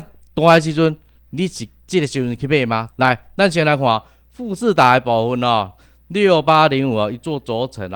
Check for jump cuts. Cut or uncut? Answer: cut